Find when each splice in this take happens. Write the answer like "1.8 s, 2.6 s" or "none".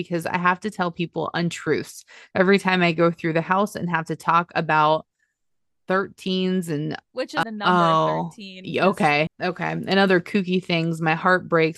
7.4 s, 9.3 s